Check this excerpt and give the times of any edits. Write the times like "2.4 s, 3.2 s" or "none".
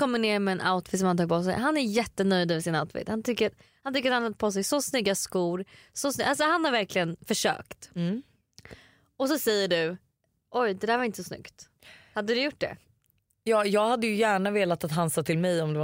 none